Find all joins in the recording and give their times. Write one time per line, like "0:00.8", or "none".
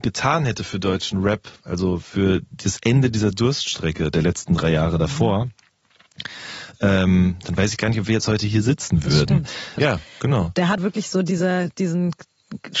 0:09.8
0:10.8